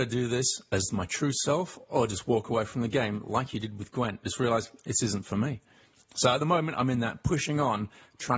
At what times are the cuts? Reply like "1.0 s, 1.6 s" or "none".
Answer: none